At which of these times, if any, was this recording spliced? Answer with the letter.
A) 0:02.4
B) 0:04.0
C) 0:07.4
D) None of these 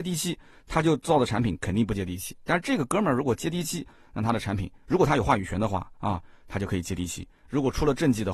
C